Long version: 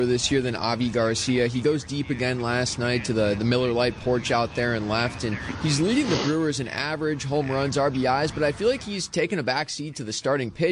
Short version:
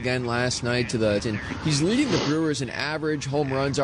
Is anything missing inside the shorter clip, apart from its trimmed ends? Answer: yes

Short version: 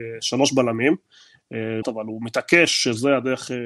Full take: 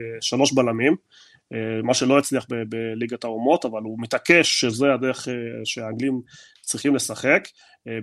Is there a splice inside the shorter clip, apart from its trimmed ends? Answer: yes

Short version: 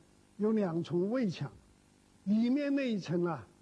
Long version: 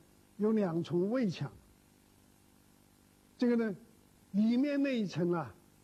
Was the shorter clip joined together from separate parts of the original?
yes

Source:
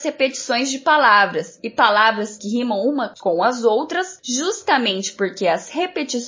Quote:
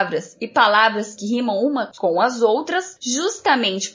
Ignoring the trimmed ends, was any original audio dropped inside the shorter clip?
no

